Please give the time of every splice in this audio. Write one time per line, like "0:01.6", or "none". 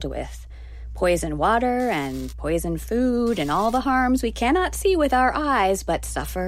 none

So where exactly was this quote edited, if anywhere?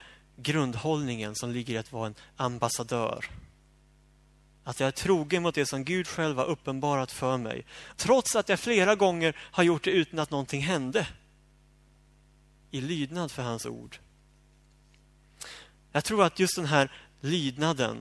0:07.9
0:12.6

